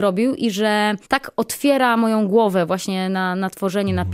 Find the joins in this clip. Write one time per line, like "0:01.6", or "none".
0:01.0